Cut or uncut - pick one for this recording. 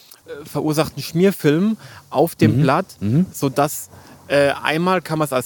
uncut